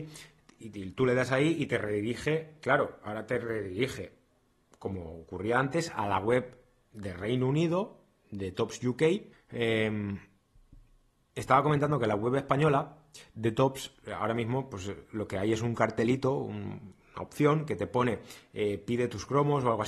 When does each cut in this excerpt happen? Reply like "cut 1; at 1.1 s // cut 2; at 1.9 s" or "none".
cut 1; at 9.3 s